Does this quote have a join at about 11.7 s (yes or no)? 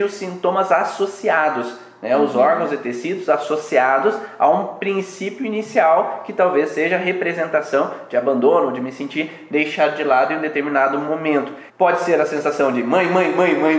yes